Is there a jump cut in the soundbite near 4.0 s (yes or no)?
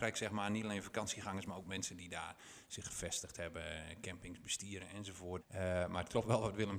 no